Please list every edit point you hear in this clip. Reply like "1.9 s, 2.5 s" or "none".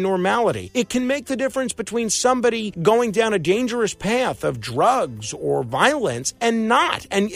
none